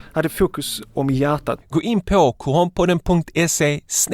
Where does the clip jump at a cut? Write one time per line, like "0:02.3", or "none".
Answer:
0:01.6